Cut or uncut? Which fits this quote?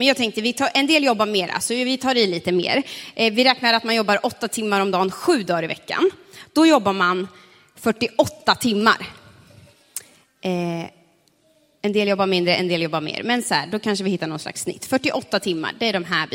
uncut